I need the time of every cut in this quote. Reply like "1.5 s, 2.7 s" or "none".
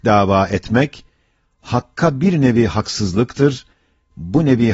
none